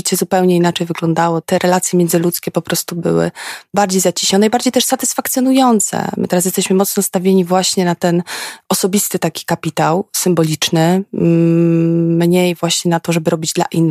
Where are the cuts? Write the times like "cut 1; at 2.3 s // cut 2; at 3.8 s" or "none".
none